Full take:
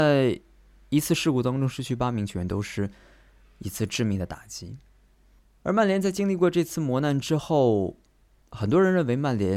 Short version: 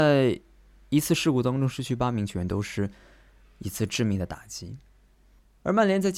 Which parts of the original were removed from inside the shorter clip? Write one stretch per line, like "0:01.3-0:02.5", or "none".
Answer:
none